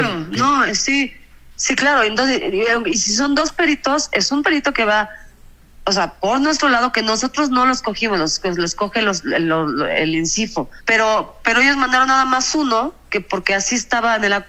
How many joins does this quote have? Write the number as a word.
one